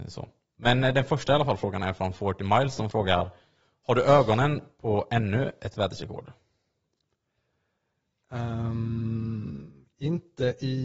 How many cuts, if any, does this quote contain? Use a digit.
0